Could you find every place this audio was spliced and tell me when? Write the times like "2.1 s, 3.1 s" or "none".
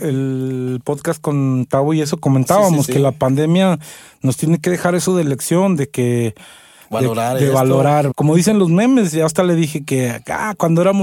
8.1 s